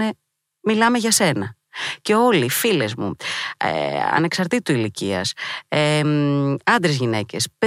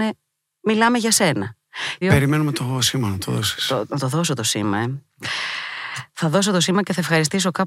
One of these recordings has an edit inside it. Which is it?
second; 1 cut; at 2.0 s

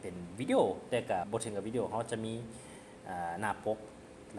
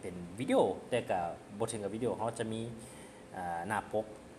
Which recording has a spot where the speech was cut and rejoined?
first; 1 cut; at 1.2 s

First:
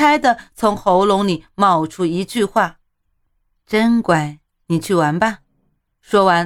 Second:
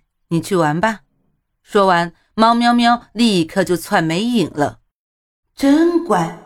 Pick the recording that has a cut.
second; 1 cut; at 5.4 s

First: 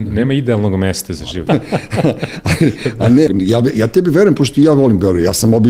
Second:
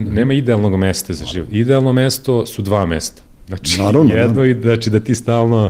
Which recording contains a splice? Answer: first; 2 cuts; at 1.5 s, 3.3 s

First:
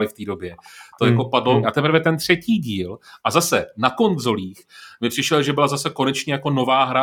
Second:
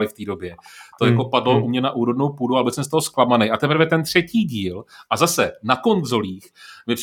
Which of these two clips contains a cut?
first; 1 cut; at 1.6 s

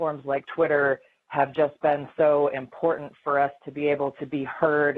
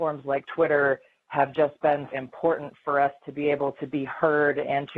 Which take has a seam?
second; 1 cut; at 2.1 s

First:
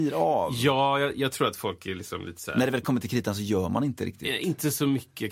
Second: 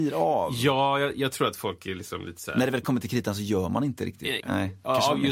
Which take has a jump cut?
second; 1 cut; at 4.4 s

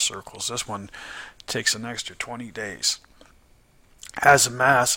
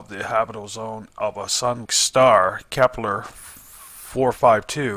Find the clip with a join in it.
second; 1 cut; at 1.9 s

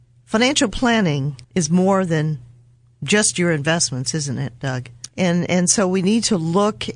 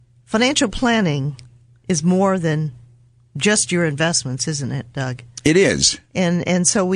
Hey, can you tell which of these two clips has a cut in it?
first; 2 cuts; at 1.4 s, 5.1 s

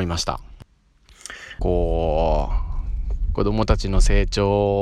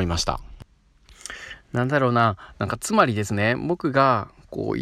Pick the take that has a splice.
first; 2 cuts; at 1.6 s, 3.4 s

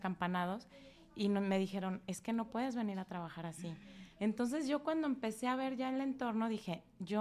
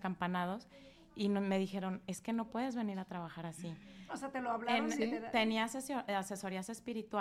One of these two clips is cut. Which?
second; 1 cut; at 4.1 s

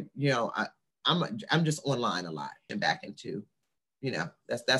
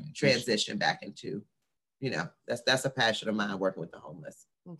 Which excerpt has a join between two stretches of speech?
first; 1 cut; at 2.7 s

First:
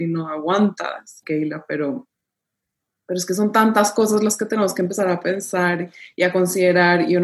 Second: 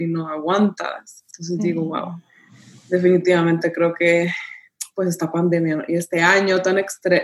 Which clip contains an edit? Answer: first; 1 cut; at 1.2 s

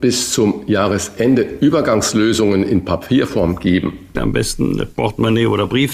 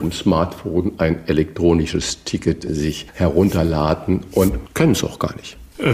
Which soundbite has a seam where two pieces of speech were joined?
first; 1 cut; at 4.1 s

